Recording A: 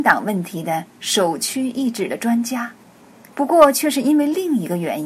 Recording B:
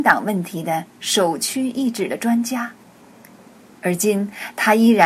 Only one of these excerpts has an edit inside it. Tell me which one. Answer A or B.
A